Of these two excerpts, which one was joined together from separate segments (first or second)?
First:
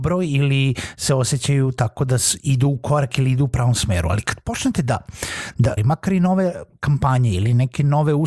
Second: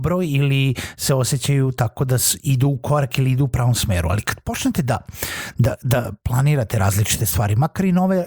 first